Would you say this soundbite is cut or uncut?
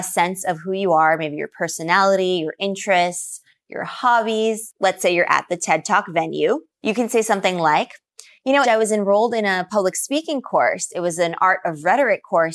cut